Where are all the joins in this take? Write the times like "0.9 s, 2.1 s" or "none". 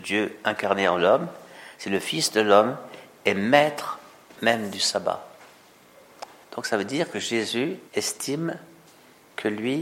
6.4 s, 7.9 s